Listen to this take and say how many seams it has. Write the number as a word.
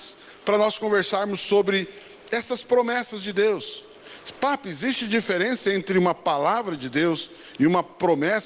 zero